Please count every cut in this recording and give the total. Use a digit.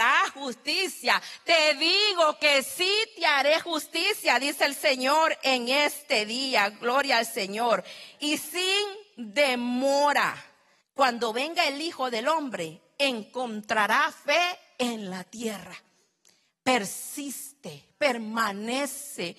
1